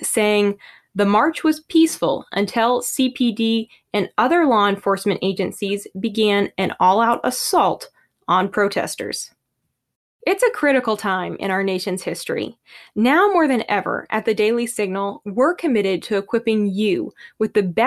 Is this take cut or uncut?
uncut